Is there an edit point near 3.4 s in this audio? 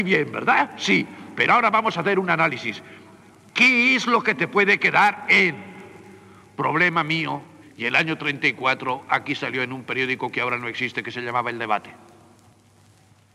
no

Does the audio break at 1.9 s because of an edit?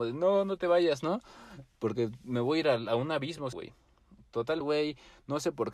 no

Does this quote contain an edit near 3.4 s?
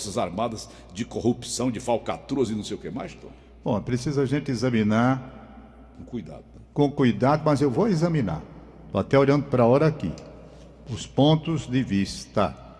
no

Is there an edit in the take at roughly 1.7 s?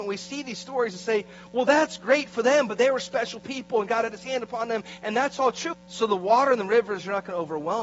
no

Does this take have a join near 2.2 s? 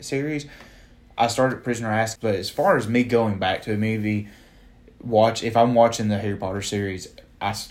yes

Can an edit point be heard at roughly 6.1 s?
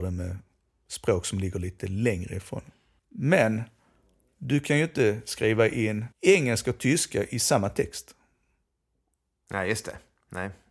yes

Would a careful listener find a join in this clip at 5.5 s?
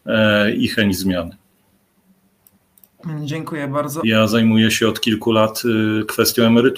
no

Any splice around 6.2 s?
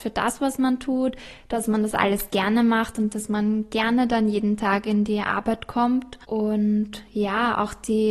yes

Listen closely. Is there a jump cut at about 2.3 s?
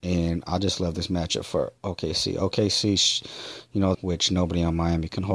no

